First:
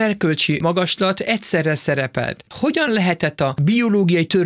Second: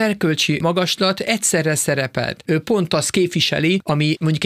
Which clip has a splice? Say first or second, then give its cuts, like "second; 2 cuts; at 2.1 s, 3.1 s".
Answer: second; 1 cut; at 2.5 s